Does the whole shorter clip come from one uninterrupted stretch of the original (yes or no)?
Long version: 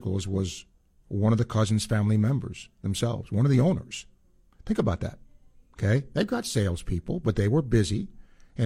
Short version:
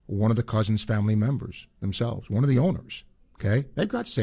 no